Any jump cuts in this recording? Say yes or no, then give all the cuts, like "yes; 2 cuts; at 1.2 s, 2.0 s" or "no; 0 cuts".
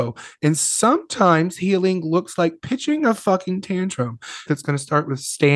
yes; 1 cut; at 4.5 s